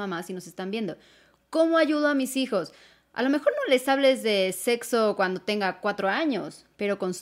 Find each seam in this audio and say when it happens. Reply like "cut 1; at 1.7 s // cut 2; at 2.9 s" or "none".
none

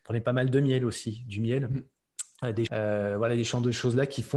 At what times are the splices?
cut 1; at 2.7 s

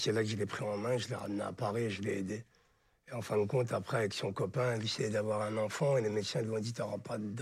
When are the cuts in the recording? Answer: none

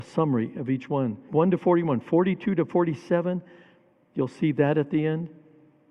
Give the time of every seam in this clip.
cut 1; at 1.3 s

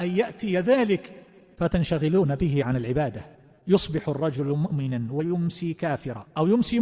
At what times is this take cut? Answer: none

